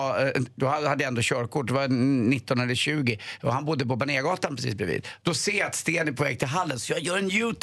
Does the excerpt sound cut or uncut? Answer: cut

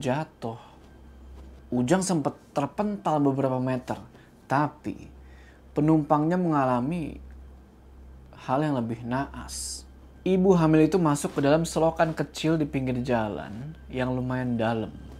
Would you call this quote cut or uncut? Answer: uncut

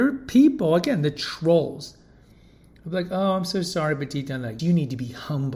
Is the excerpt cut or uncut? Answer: cut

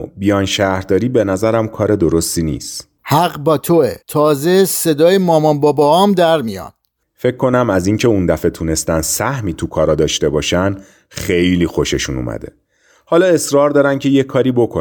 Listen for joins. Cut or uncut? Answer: cut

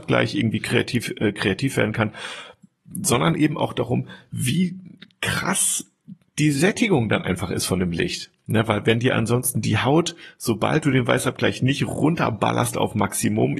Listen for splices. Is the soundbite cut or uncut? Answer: uncut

